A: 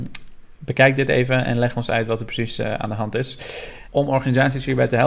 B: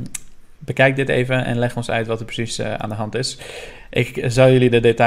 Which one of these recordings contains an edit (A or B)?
A